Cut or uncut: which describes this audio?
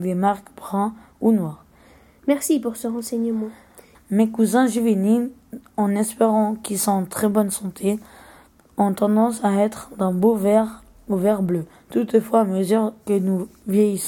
cut